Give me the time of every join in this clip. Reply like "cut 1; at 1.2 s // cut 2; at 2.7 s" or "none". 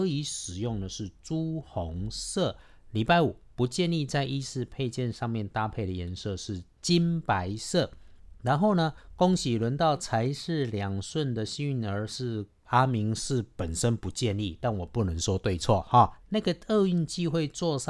cut 1; at 12.6 s // cut 2; at 16.2 s